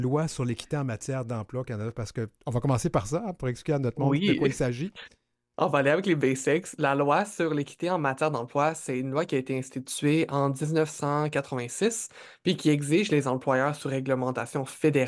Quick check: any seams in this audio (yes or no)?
no